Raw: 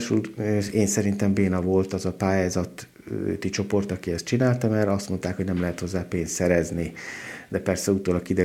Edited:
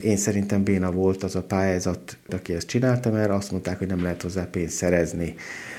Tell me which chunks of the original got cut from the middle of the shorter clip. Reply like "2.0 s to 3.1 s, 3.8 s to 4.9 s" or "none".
3.0 s to 3.9 s